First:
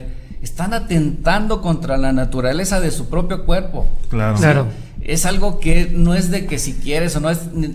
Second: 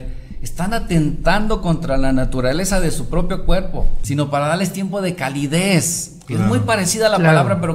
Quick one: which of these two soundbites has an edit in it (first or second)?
second